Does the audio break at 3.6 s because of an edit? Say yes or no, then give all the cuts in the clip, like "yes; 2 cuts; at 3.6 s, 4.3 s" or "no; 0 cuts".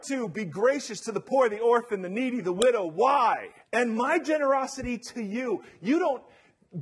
yes; 1 cut; at 3.6 s